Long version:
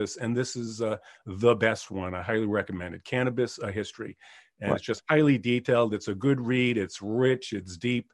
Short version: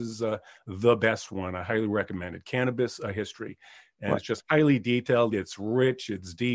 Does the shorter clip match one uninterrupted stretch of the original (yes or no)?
no